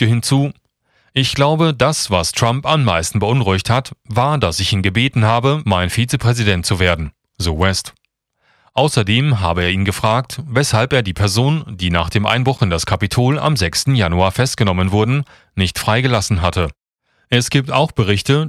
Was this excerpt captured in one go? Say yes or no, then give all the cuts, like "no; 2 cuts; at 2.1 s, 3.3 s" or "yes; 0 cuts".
yes; 0 cuts